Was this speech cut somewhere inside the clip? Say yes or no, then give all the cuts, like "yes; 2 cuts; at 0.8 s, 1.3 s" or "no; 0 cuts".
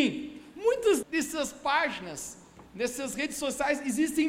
yes; 1 cut; at 1.0 s